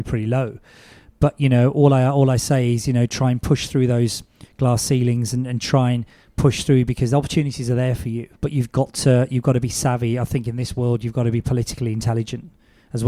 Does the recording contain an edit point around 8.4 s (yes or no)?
yes